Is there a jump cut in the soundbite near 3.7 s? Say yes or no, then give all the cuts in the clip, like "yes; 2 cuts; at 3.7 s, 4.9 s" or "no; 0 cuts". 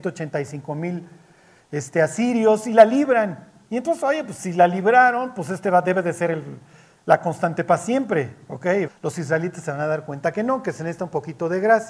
no; 1 cut; at 8.9 s